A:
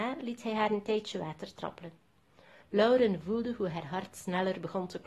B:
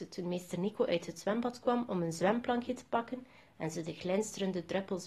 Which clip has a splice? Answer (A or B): A